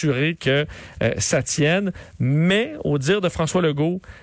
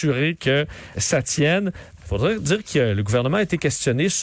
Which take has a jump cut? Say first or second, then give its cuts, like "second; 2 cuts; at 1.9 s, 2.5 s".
second; 2 cuts; at 0.9 s, 2.0 s